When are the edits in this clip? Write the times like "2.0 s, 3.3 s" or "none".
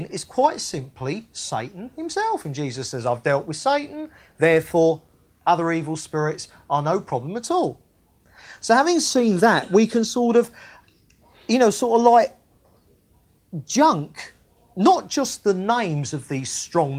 none